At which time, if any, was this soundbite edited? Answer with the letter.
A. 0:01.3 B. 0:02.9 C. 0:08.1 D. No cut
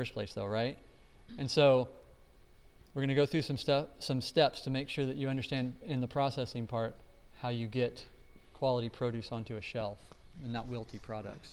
D